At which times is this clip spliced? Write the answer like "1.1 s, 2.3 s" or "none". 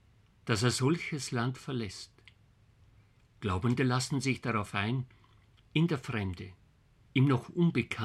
none